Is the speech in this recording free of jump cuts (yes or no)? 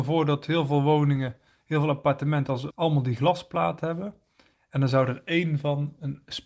no